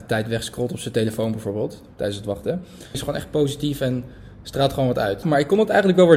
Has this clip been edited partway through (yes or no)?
yes